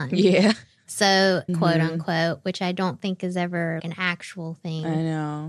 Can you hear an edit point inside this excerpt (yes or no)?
yes